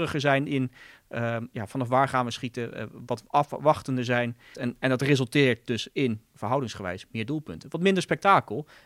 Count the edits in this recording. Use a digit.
2